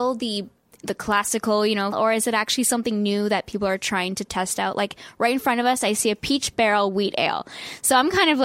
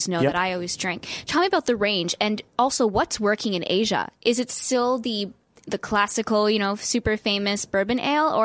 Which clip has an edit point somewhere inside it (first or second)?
first